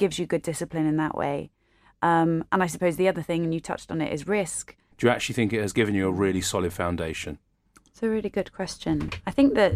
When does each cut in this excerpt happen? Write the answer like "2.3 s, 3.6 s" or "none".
4.9 s